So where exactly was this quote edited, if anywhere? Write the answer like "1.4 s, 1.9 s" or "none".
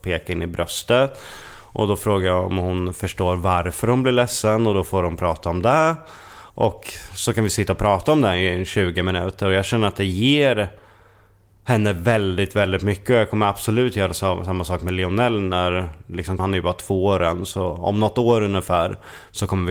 6.5 s, 16.4 s